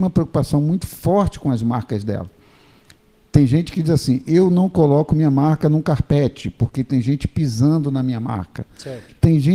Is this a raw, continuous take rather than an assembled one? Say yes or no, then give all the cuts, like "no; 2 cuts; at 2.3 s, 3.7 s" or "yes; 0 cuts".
yes; 0 cuts